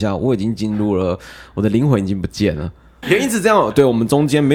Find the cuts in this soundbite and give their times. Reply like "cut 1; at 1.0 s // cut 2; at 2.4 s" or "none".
cut 1; at 3.0 s